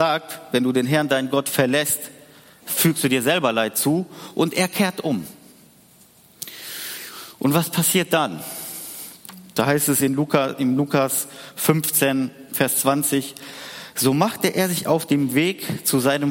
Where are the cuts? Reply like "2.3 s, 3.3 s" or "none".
none